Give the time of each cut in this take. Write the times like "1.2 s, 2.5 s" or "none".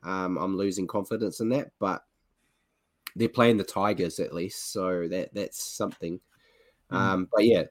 none